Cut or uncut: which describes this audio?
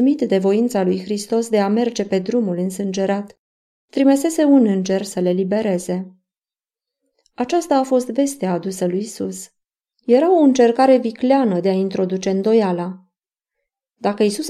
cut